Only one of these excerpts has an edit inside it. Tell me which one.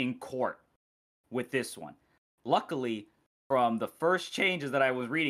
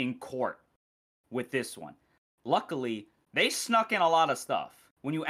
second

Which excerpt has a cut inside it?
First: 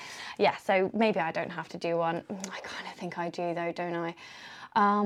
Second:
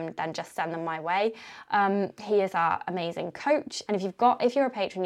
second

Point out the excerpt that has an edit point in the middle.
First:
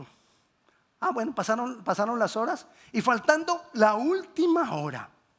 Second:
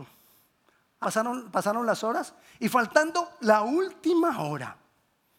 second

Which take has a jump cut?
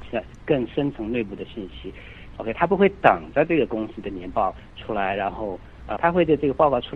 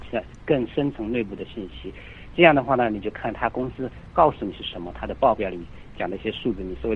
first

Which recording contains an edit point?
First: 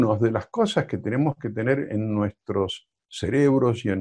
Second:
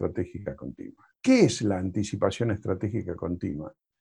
second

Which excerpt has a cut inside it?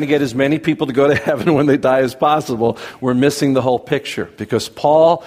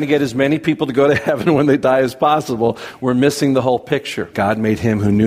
second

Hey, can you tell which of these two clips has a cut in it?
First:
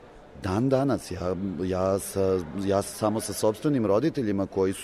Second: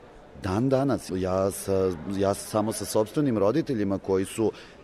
second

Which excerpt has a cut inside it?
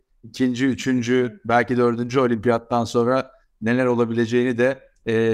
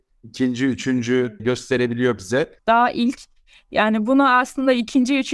second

